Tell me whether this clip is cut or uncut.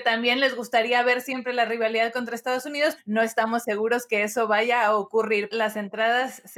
cut